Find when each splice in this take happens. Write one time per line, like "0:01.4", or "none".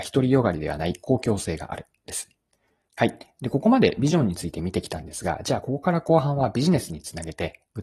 0:02.9